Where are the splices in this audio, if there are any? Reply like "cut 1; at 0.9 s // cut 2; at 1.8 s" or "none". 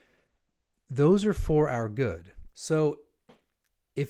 cut 1; at 2.5 s